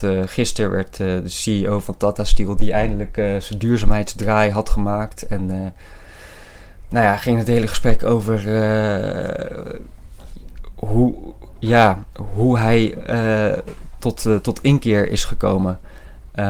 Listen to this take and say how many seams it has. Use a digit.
1